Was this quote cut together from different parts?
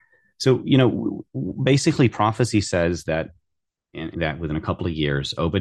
yes; 1 cut; at 4.1 s

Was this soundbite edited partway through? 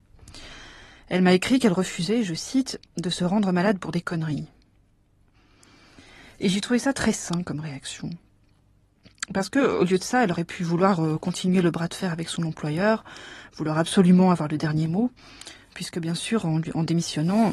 no; 0 cuts

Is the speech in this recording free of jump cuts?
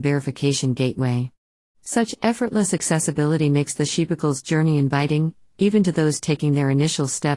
yes; 0 cuts

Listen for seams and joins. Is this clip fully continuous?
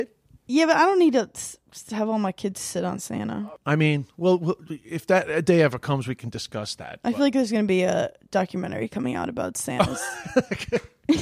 yes; 0 cuts

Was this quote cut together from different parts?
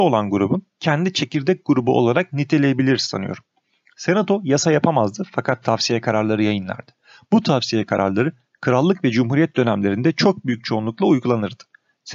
no; 0 cuts

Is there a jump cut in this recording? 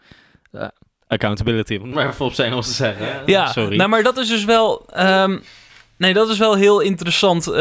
no; 0 cuts

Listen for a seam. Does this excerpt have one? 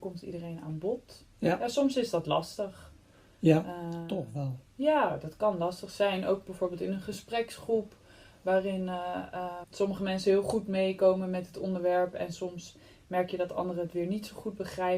yes; 1 cut; at 9.6 s

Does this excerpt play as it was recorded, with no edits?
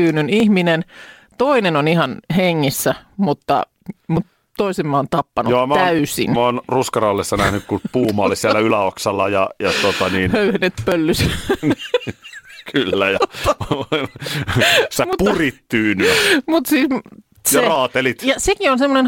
yes; 0 cuts

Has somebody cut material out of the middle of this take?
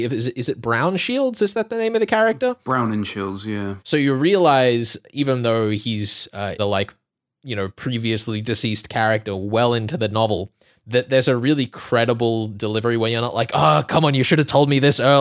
yes; 2 cuts; at 3.8 s, 6.6 s

